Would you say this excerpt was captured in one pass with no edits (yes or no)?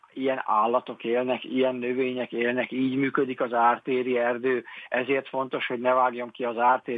yes